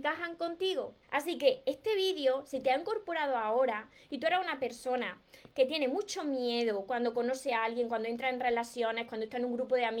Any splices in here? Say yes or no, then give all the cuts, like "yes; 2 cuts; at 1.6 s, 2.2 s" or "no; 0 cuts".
yes; 1 cut; at 1.0 s